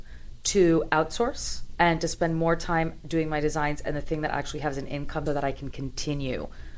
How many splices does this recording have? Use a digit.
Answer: 1